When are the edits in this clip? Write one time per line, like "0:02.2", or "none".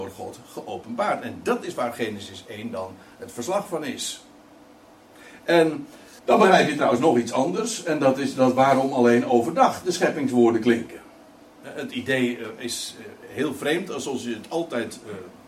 0:06.2